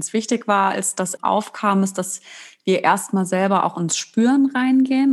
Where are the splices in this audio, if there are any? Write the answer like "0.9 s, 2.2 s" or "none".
1.2 s